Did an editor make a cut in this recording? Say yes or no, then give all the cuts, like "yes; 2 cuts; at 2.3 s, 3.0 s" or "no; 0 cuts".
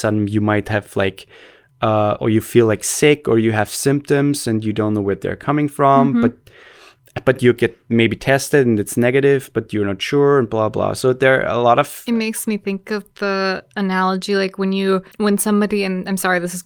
yes; 1 cut; at 15.1 s